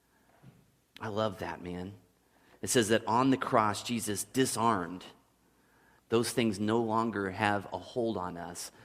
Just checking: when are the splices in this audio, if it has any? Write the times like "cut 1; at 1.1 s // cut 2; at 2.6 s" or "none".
cut 1; at 6.0 s